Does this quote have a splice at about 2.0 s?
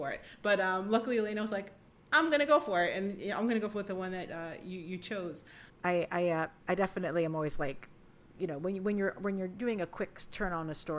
no; 1 cut; at 5.7 s

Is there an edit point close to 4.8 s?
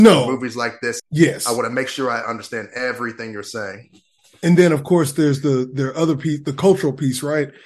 no; 1 cut; at 1.0 s

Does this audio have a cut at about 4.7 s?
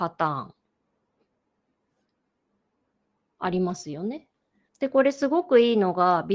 yes; 1 cut; at 4.7 s

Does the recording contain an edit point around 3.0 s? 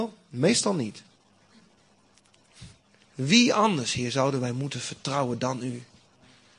yes; 1 cut; at 3.0 s

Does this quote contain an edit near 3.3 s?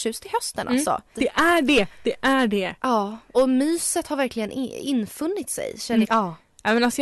yes; 3 cuts; at 1.1 s, 3.3 s, 6.0 s

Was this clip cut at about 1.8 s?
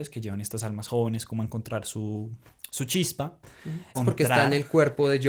no; 1 cut; at 3.9 s

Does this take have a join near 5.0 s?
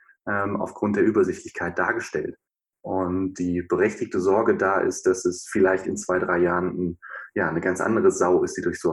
no; 1 cut; at 2.8 s

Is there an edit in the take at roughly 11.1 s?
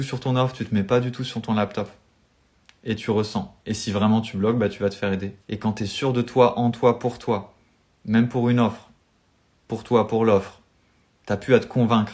no; 1 cut; at 5.4 s

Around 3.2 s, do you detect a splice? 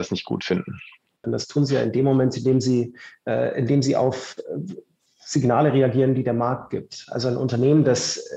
no; 1 cut; at 1.2 s

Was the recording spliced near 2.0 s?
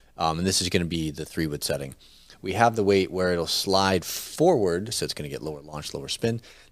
no; 1 cut; at 4.9 s

